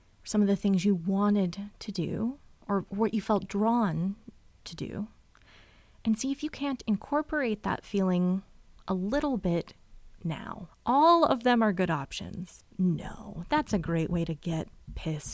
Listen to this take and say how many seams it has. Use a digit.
2